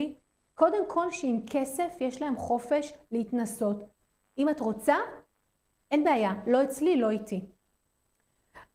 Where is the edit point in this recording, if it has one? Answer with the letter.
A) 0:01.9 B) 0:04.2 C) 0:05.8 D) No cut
B